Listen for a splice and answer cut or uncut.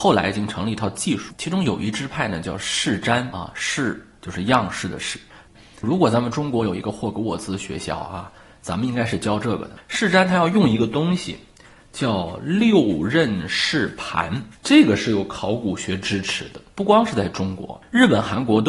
uncut